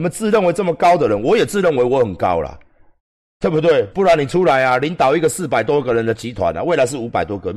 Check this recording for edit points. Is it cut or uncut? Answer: cut